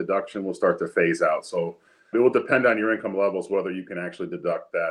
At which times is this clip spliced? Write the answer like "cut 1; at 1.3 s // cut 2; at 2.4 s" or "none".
cut 1; at 2.1 s

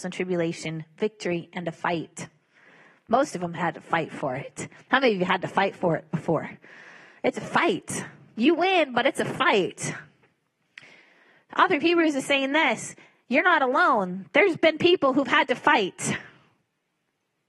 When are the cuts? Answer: cut 1; at 3.6 s

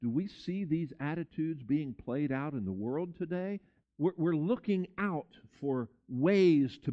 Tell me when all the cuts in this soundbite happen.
cut 1; at 3.8 s

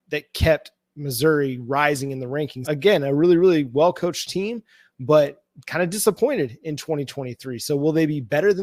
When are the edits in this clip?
cut 1; at 2.6 s

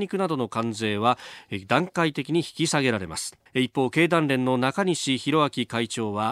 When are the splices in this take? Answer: cut 1; at 3.5 s

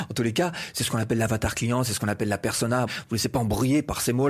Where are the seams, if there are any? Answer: cut 1; at 2.9 s

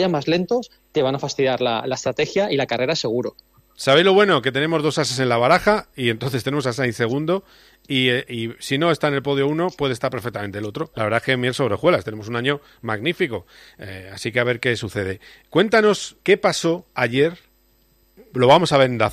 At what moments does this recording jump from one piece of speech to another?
cut 1; at 10.9 s // cut 2; at 16.2 s

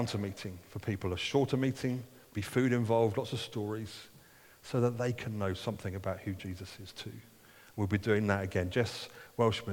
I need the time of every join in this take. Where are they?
none

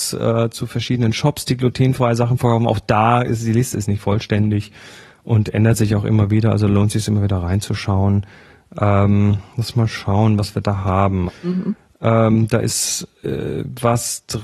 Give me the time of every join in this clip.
cut 1; at 11.3 s

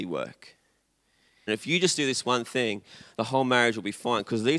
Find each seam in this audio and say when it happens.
cut 1; at 1.5 s

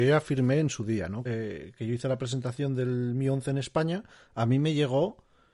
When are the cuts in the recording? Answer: cut 1; at 1.3 s

